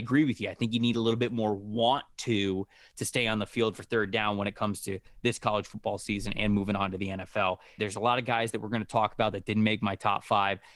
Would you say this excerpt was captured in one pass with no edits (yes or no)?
no